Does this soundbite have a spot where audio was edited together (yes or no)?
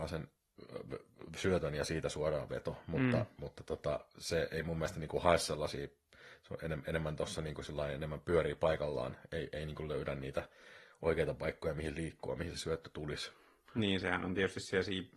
no